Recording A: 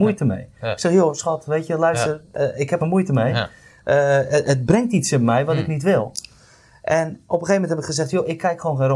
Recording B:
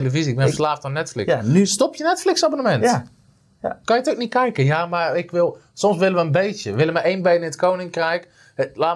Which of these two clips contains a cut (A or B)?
A